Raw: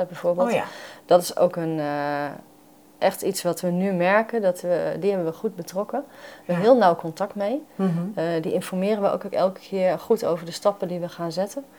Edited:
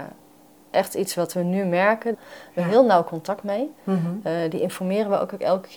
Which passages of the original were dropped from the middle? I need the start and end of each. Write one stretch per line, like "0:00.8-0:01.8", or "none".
0:04.4-0:06.1